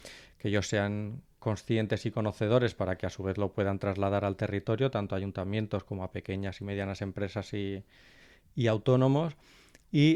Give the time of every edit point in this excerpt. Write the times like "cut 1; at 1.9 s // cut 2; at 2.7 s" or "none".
none